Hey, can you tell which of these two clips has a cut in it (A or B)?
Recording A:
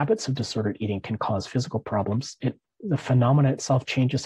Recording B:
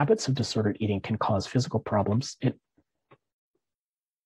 A